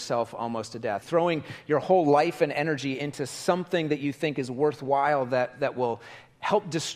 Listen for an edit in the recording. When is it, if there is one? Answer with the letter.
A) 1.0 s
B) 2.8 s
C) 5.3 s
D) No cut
A